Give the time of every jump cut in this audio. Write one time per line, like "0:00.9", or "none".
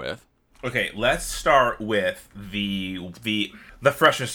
none

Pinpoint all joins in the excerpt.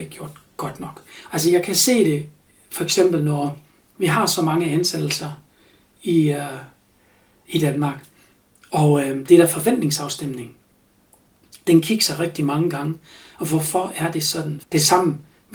0:01.3
0:14.6

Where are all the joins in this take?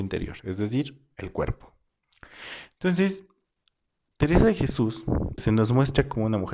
0:05.4

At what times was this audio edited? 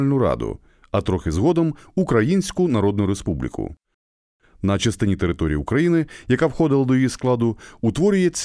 0:04.4

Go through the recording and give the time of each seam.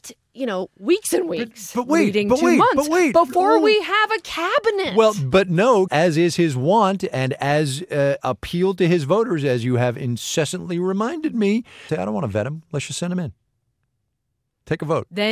0:05.9
0:11.9

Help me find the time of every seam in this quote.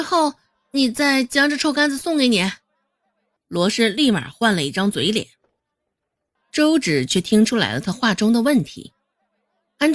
0:03.4
0:06.4

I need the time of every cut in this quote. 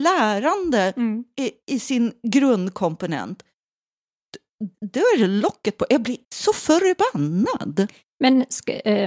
0:04.7
0:06.2

